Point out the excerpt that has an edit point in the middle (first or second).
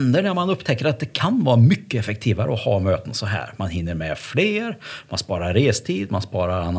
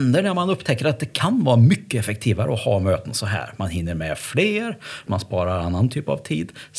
second